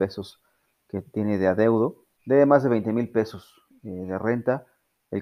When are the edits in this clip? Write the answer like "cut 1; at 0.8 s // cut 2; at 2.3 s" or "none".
cut 1; at 2.2 s